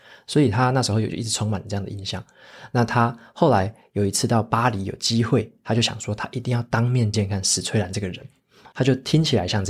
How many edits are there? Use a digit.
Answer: 2